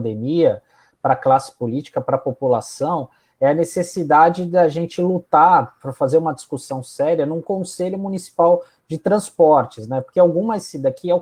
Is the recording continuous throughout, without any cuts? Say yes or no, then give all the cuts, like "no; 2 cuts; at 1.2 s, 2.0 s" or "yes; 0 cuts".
yes; 0 cuts